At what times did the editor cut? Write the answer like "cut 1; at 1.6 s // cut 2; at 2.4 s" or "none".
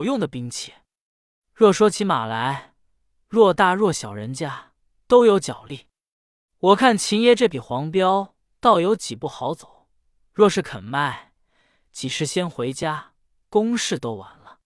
cut 1; at 3.1 s